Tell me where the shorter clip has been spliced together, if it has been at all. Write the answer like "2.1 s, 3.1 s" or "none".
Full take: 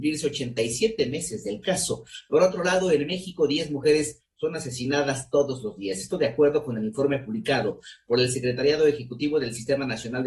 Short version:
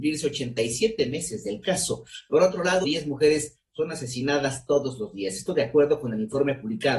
2.8 s